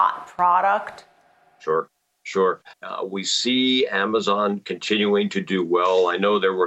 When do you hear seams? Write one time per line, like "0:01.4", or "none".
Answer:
0:02.7